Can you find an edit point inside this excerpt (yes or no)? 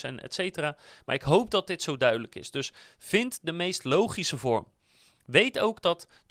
no